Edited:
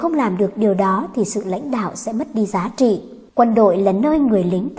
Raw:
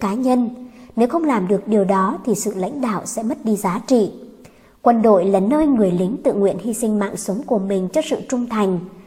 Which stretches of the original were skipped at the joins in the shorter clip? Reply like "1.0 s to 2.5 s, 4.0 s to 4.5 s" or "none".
4.4 s to 4.8 s